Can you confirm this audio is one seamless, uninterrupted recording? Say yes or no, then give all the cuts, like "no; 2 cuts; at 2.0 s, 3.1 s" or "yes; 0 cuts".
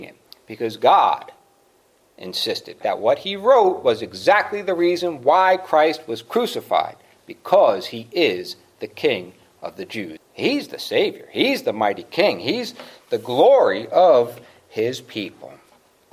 no; 2 cuts; at 2.8 s, 10.2 s